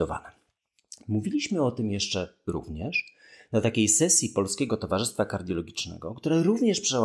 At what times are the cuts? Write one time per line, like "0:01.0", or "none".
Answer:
none

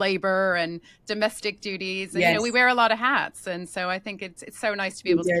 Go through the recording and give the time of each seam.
none

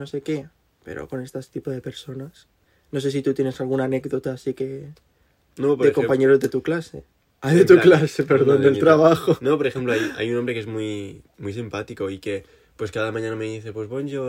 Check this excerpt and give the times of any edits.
none

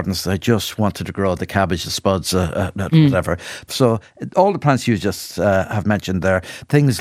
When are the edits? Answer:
0:03.7

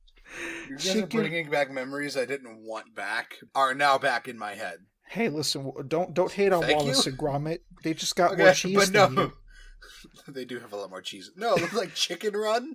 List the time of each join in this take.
0:03.5

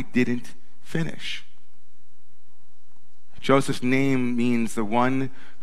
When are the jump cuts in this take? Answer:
0:03.4

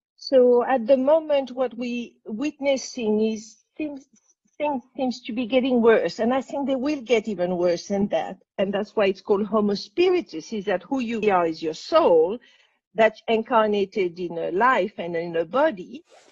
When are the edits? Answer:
0:08.5
0:11.2

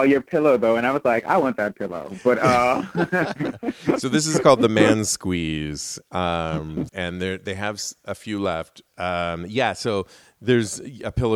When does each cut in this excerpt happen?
0:06.9
0:08.9

